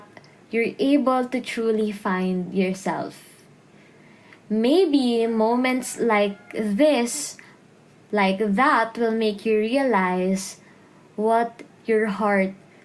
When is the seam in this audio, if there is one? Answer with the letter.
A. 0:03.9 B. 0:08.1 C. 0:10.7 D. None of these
D